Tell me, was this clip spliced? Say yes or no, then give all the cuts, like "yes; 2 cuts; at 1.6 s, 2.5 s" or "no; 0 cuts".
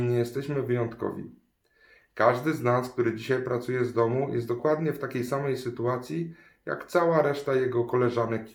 no; 0 cuts